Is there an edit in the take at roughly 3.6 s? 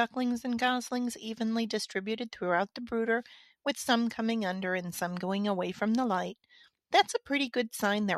no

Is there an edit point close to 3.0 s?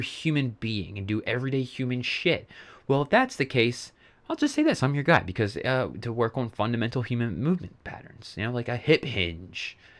no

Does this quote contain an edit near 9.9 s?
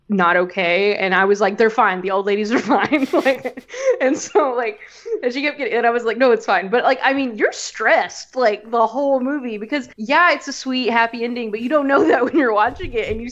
yes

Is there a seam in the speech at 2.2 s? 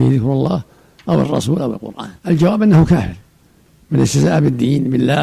yes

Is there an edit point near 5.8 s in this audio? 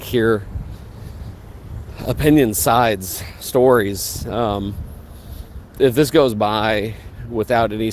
yes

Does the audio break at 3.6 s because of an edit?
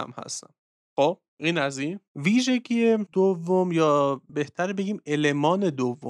no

